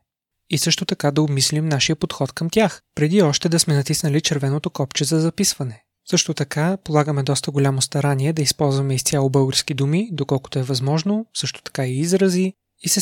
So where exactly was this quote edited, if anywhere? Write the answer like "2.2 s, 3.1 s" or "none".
6.0 s

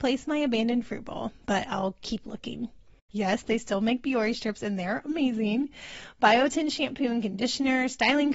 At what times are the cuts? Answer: 3.1 s

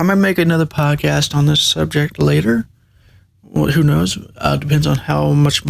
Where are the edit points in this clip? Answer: none

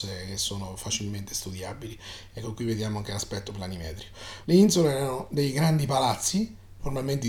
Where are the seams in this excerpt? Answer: 4.4 s

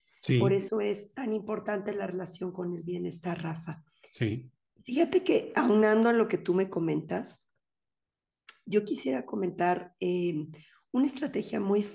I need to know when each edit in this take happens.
none

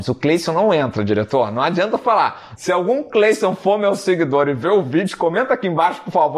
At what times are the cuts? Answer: 2.6 s

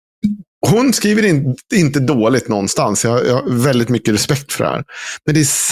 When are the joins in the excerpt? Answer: none

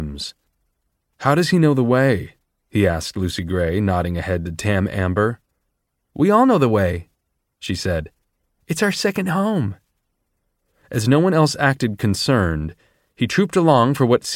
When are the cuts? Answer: none

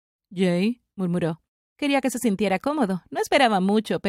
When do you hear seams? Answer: 1.6 s

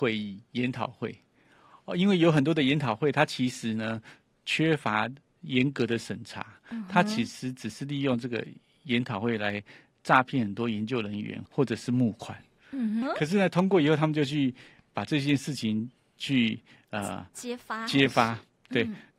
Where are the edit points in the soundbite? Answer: 11.4 s, 13.0 s

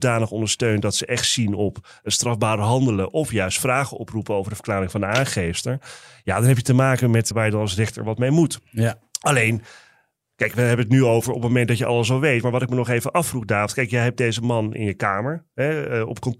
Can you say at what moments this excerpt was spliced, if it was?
7.3 s

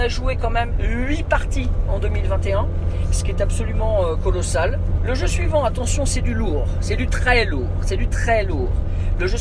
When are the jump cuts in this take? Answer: 5.0 s, 8.1 s

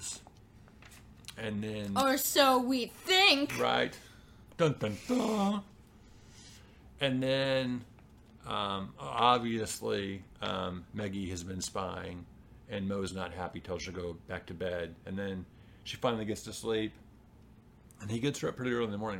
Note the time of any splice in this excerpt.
none

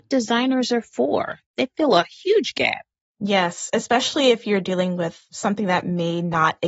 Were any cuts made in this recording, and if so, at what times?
none

